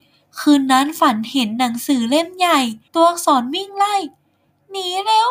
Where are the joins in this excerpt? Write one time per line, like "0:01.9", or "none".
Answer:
0:02.9